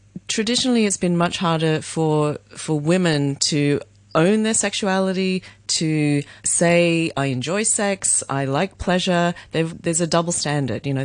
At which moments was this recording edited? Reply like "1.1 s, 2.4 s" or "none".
6.4 s, 9.7 s